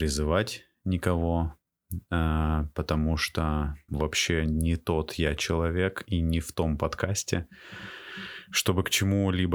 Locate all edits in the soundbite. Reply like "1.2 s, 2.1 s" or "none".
3.9 s